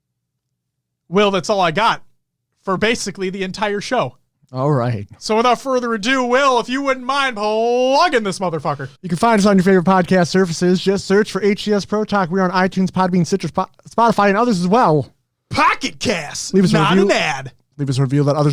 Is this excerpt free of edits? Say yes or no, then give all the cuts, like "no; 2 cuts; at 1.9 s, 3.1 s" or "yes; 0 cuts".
no; 1 cut; at 8.9 s